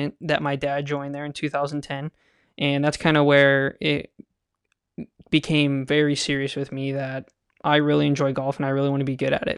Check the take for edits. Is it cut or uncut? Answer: uncut